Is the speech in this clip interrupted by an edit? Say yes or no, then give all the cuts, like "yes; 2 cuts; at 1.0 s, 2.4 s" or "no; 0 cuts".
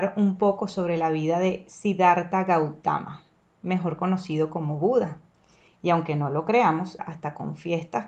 yes; 2 cuts; at 5.7 s, 7.0 s